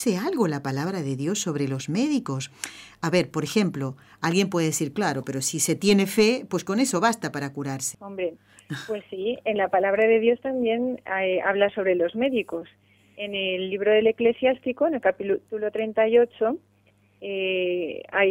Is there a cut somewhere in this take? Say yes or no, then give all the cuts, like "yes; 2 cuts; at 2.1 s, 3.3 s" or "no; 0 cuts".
yes; 1 cut; at 7.9 s